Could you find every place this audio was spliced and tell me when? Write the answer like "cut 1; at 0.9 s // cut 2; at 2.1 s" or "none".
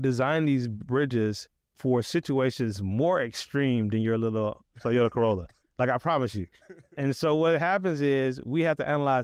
none

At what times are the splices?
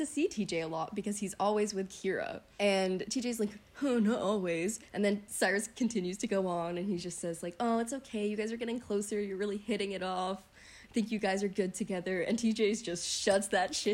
none

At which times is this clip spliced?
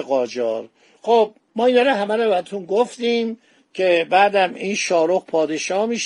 cut 1; at 1.4 s

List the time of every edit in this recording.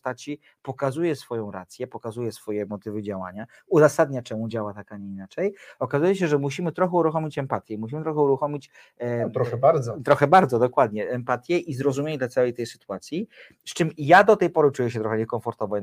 none

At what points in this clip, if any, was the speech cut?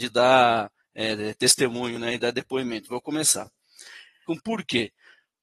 cut 1; at 4.3 s

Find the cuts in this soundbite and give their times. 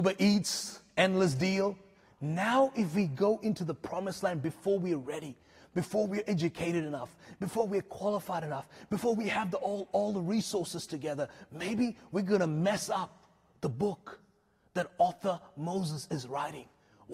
cut 1; at 2.0 s

